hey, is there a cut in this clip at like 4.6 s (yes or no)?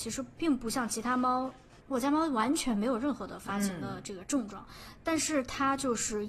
no